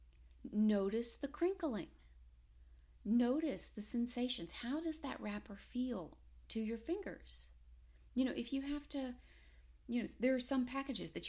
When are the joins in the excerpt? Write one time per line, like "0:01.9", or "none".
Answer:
none